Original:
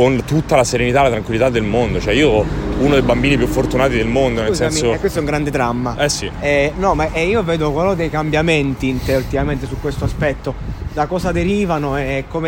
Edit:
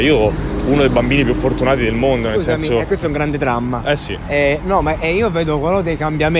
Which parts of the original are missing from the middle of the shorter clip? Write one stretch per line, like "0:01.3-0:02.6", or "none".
none